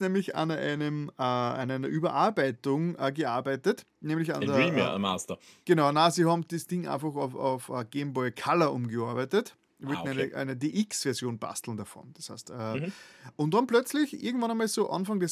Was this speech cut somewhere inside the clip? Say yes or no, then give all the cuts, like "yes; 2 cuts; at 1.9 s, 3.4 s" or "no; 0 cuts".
no; 0 cuts